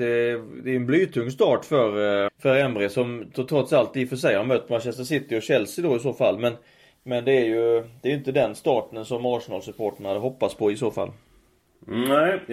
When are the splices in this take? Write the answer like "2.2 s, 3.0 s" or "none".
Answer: 2.3 s